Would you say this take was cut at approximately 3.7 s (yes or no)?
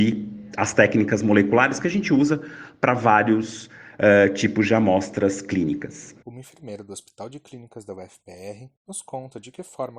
no